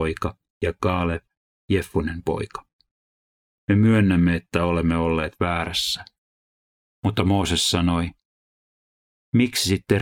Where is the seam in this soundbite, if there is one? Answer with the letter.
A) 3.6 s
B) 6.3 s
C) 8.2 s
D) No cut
A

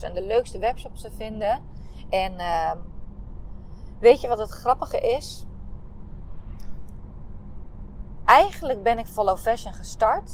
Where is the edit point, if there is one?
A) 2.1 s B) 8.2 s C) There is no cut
A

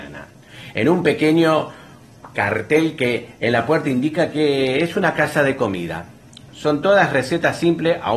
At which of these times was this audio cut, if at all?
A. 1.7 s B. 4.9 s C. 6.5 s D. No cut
C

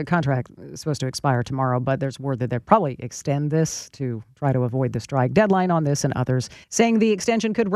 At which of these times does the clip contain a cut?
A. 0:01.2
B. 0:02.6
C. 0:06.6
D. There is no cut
C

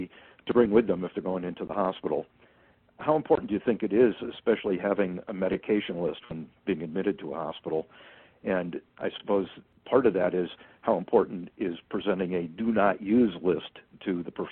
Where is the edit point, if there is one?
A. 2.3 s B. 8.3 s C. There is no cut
C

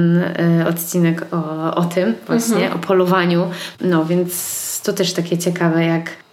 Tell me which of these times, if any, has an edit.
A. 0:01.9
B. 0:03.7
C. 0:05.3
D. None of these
B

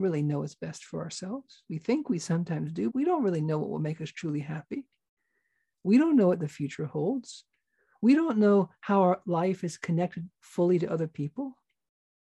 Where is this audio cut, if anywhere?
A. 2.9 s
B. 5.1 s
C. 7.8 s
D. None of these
A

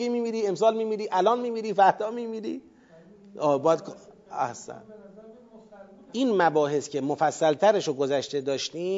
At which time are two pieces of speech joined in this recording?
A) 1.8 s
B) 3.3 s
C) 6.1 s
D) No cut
C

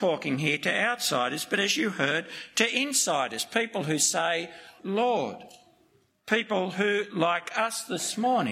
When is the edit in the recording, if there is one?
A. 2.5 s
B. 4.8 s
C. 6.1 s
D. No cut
B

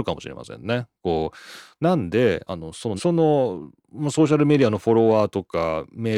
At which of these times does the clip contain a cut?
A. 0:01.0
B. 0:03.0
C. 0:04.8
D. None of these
B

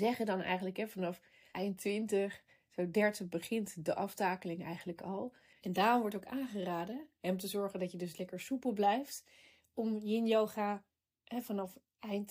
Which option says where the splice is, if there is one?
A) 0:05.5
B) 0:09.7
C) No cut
A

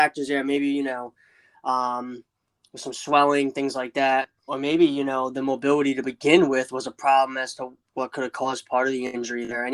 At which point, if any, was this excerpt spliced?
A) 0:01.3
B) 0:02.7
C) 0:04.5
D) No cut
C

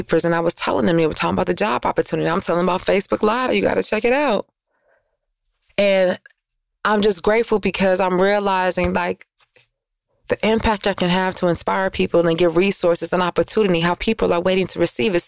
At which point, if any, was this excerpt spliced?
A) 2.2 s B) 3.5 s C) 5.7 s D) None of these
B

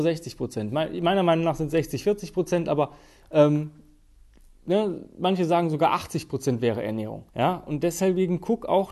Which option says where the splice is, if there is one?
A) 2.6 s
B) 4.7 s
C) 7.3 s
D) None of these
C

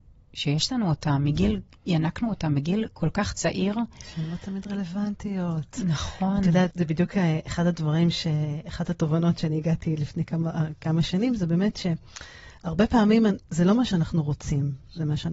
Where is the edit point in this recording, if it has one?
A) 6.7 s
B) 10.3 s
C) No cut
A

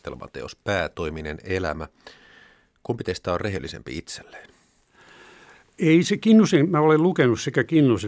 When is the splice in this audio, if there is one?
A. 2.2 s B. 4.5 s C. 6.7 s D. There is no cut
D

